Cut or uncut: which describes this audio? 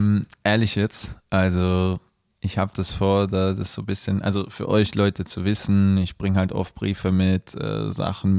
uncut